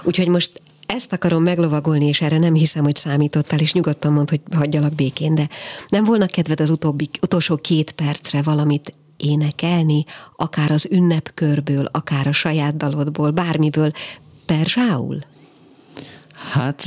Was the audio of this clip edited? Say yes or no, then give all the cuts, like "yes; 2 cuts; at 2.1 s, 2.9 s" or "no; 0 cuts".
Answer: no; 0 cuts